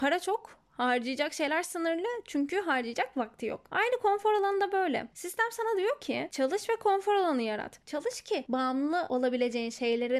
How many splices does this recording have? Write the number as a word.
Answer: two